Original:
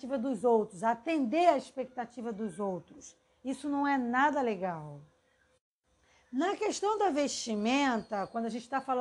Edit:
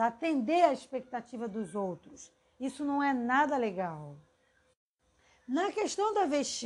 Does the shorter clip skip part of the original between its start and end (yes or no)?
no